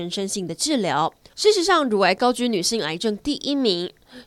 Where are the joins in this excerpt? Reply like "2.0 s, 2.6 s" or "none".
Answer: 1.3 s